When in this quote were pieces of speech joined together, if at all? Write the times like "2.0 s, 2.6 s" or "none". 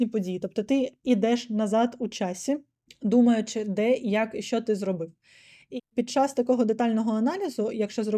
none